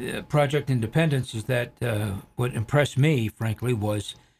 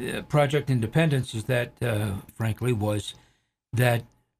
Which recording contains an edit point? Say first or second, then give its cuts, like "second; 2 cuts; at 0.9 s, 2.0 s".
second; 1 cut; at 2.3 s